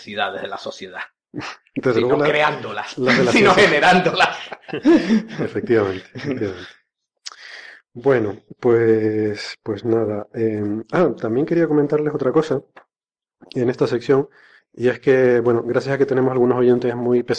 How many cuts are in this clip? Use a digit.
0